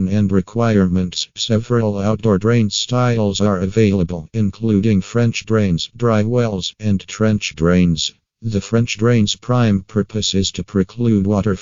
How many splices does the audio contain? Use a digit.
2